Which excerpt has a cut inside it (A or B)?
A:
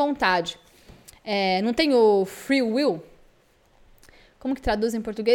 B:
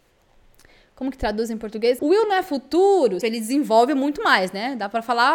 B